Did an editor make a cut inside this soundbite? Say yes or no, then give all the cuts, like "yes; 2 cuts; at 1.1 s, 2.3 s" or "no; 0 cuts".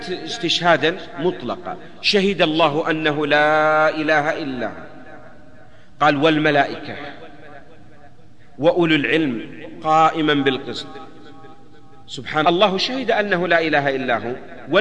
yes; 1 cut; at 12.4 s